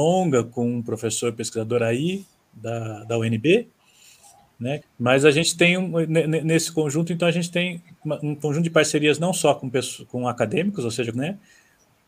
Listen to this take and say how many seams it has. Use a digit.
2